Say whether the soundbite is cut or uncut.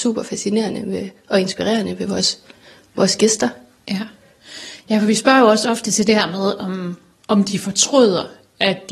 uncut